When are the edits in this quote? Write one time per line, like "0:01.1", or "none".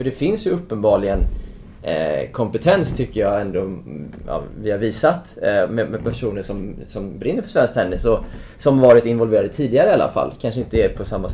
none

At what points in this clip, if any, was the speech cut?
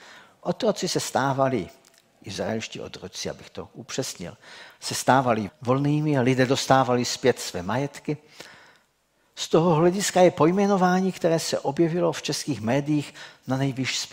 0:05.5

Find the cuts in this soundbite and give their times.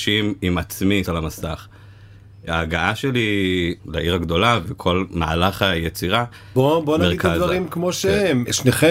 0:01.0
0:06.5

